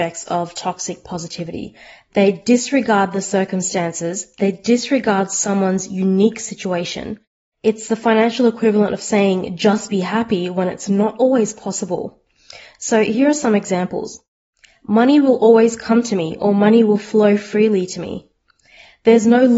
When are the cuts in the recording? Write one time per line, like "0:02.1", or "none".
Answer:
none